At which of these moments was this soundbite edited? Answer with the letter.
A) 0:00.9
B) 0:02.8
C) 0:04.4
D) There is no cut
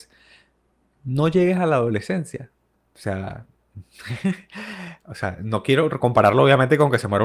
D